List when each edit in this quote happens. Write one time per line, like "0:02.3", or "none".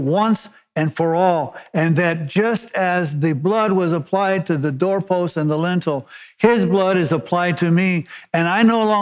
none